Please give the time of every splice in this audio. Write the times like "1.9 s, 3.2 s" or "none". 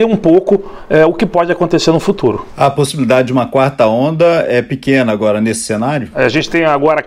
none